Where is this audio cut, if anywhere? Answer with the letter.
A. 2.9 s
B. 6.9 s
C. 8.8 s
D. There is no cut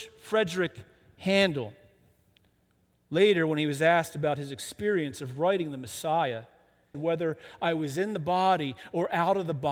B